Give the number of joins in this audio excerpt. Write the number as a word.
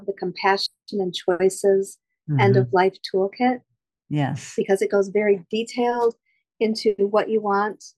zero